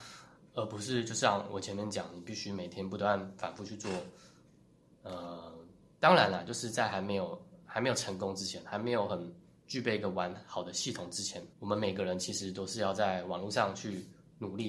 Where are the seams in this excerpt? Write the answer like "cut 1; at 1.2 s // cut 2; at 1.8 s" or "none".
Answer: cut 1; at 11.5 s